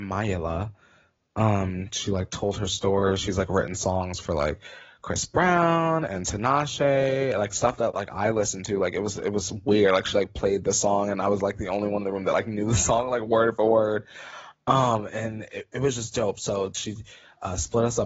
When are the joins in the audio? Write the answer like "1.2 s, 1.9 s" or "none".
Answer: none